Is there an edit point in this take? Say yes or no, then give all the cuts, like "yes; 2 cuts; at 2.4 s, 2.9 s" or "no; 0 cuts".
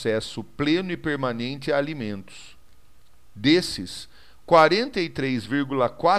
no; 0 cuts